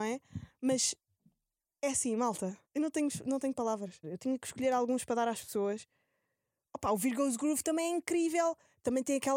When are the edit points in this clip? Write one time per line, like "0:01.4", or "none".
0:02.7
0:04.0